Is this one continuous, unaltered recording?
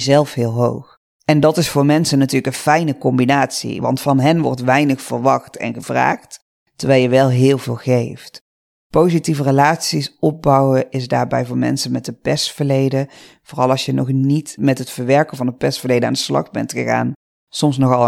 yes; 0 cuts

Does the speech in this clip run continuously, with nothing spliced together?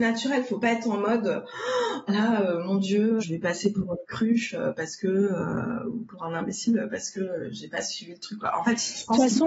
no; 2 cuts; at 2.1 s, 3.2 s

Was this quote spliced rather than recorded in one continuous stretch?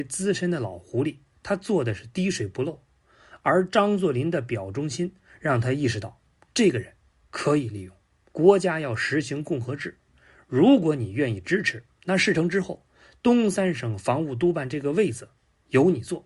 yes; 1 cut; at 8.3 s

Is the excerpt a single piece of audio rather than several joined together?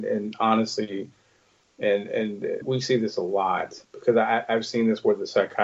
no; 2 cuts; at 2.6 s, 3.8 s

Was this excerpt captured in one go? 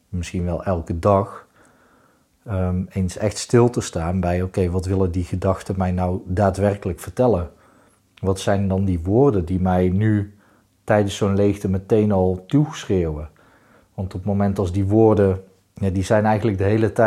yes; 0 cuts

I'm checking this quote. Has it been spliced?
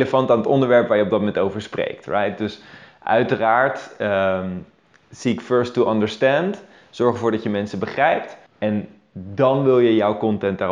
yes; 1 cut; at 8.5 s

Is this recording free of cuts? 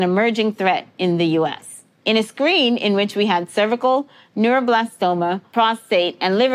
yes; 0 cuts

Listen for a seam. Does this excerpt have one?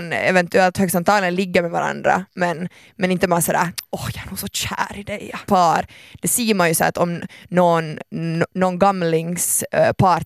yes; 1 cut; at 5.5 s

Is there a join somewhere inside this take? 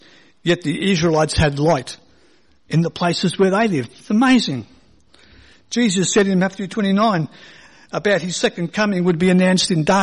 no; 0 cuts

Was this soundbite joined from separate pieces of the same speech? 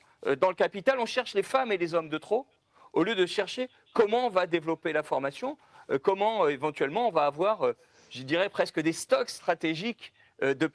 no; 0 cuts

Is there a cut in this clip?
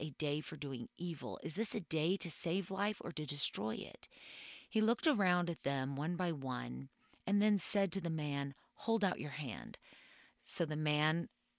no; 0 cuts

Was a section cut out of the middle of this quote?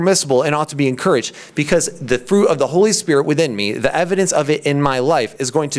no; 0 cuts

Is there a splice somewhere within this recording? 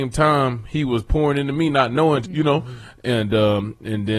yes; 1 cut; at 2.2 s

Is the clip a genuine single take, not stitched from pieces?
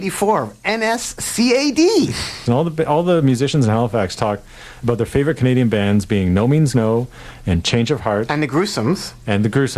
no; 1 cut; at 2.5 s

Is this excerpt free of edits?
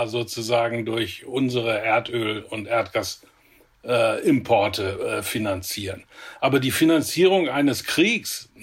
yes; 0 cuts

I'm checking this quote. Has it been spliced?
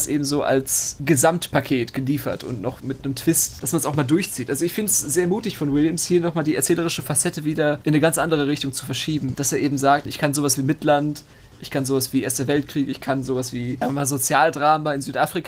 no; 0 cuts

